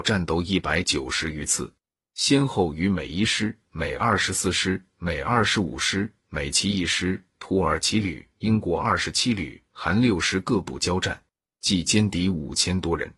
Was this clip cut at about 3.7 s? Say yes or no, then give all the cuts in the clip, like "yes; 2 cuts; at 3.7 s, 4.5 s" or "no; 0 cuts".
no; 0 cuts